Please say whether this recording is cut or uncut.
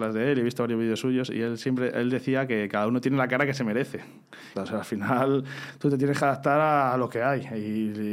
cut